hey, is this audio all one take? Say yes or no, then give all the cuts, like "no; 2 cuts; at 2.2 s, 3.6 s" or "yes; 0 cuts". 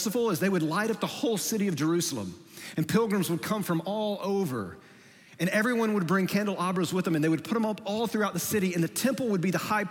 yes; 0 cuts